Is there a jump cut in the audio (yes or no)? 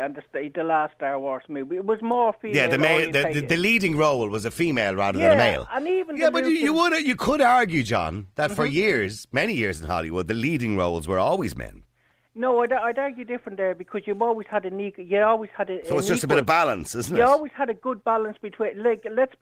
no